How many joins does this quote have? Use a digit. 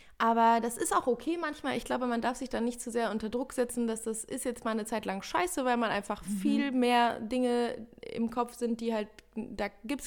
0